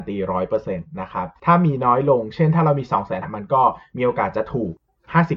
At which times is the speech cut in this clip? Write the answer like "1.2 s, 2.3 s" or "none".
3.2 s